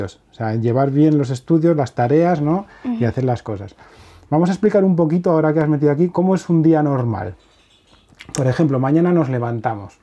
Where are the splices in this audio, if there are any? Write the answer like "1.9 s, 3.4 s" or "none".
6.1 s